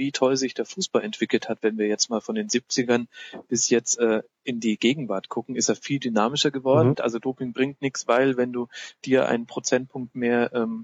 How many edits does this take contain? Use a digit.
1